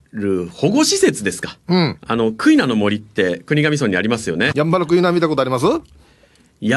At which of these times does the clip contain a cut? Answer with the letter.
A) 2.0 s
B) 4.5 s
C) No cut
B